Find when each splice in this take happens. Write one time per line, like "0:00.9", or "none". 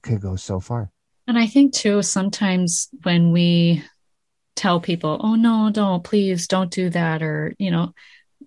none